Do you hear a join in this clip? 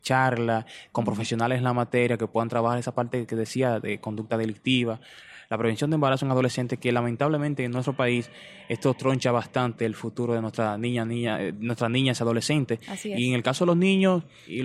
no; 0 cuts

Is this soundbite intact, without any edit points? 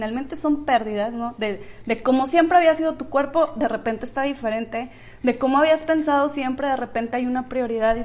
yes; 0 cuts

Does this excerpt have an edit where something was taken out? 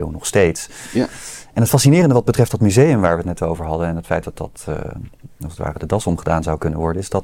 no; 0 cuts

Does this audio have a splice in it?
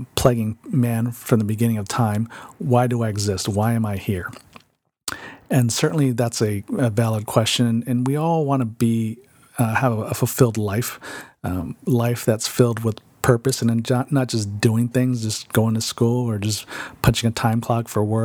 no; 0 cuts

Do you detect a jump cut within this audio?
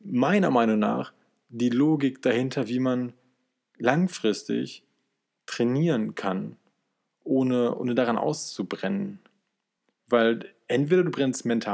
no; 0 cuts

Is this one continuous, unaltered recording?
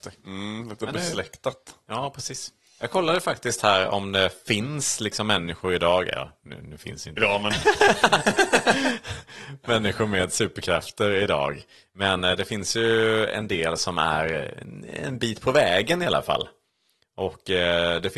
no; 1 cut; at 7.2 s

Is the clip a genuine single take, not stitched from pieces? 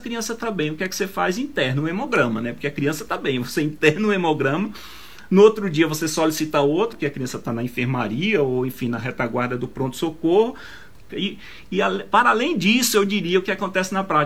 no; 2 cuts; at 6.9 s, 11.1 s

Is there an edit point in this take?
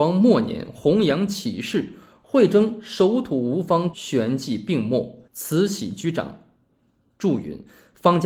yes; 3 cuts; at 3.9 s, 5.2 s, 6.7 s

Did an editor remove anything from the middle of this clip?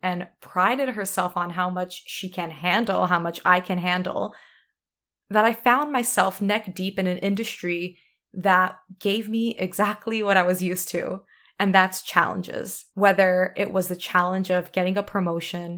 yes; 1 cut; at 12.9 s

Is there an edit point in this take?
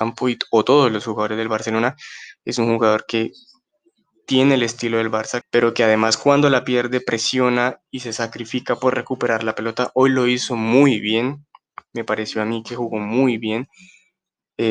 yes; 1 cut; at 5.4 s

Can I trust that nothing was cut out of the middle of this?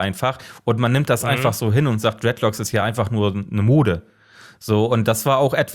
yes; 0 cuts

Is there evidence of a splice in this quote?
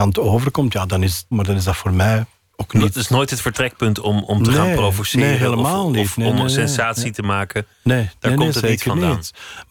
yes; 1 cut; at 1.3 s

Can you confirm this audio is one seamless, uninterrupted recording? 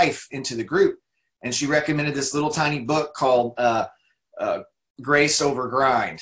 yes; 0 cuts

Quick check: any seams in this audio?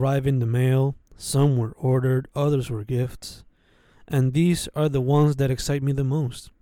no; 0 cuts

